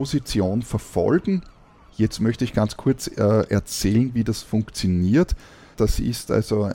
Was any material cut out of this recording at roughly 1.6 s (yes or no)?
no